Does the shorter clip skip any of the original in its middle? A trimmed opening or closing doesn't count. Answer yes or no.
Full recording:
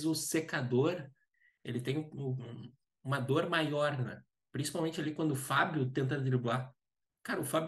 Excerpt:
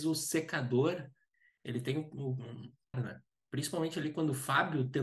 yes